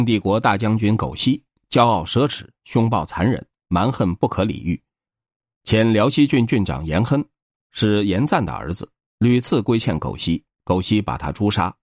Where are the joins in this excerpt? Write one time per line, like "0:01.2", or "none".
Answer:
none